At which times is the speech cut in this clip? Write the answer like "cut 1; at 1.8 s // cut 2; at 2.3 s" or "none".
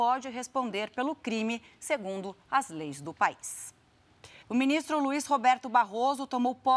cut 1; at 4.4 s